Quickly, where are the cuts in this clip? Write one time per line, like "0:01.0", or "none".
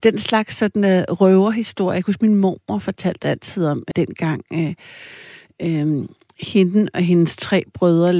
0:03.9